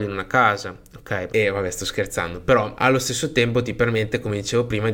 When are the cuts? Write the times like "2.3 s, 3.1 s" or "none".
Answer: 1.3 s, 2.8 s